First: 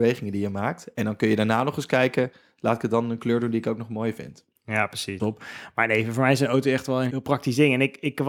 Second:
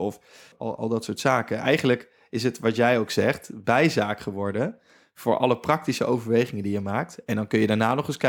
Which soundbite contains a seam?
first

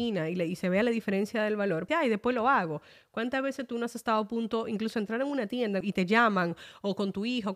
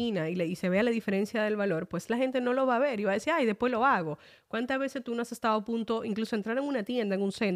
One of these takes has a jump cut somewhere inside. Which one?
first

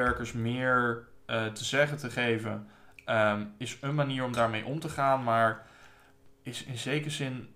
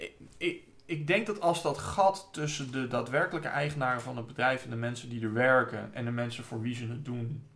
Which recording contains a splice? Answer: first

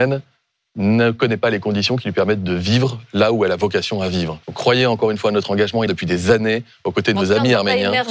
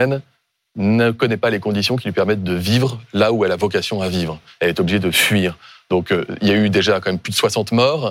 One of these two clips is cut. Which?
first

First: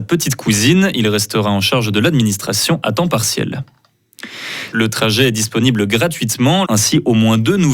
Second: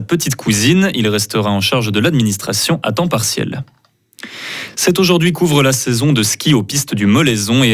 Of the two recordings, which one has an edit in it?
first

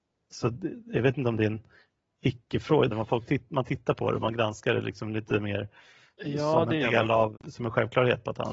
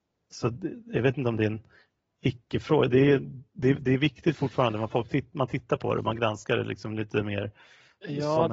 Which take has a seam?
first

